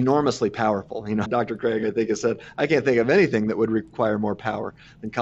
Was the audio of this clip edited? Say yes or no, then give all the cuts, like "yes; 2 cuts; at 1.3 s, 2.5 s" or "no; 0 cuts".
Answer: yes; 1 cut; at 1.3 s